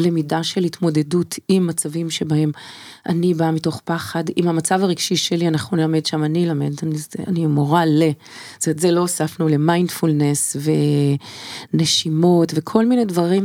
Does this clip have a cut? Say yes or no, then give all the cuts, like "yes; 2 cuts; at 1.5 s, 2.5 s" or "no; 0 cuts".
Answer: no; 0 cuts